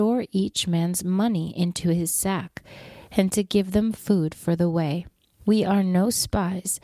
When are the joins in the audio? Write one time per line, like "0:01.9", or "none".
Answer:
0:05.4